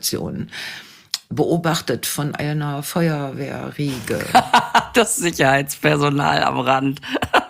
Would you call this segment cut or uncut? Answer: uncut